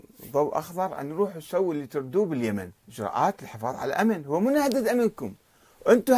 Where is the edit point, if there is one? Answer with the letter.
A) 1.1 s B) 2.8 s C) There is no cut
B